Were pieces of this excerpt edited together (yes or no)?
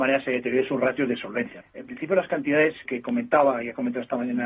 yes